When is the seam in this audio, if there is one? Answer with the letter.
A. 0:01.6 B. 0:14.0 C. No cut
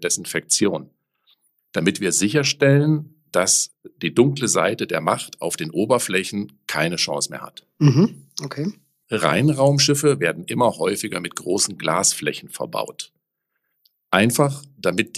A